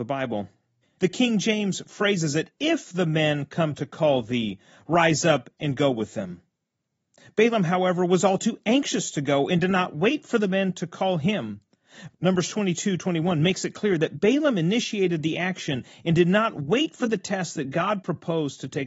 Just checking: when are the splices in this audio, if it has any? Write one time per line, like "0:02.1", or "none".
0:00.9
0:12.1

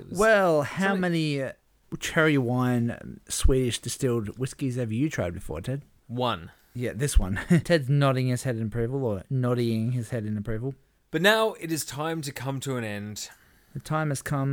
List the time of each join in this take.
0:07.6
0:11.1

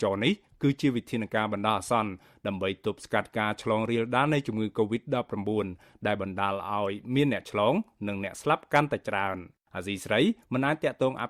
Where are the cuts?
0:09.7

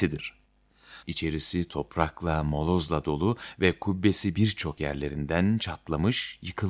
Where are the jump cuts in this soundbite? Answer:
0:01.0

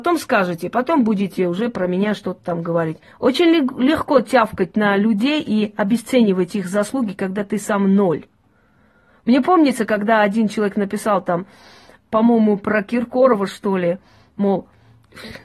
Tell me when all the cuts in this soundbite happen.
0:03.1

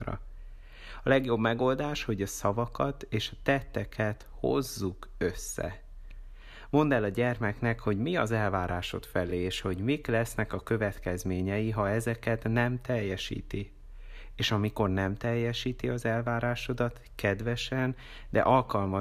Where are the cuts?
none

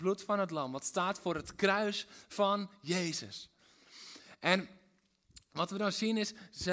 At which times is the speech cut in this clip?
none

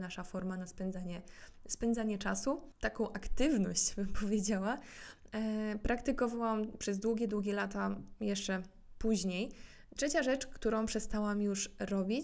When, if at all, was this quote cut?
0:10.0

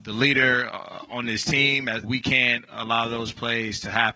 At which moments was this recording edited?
0:02.0

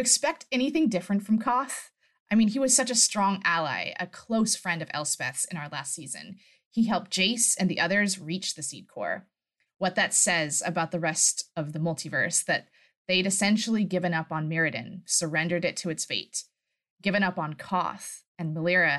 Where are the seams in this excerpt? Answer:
0:09.7

